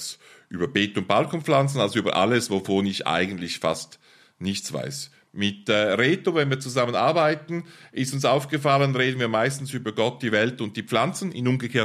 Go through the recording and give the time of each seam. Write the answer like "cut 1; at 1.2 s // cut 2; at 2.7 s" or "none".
none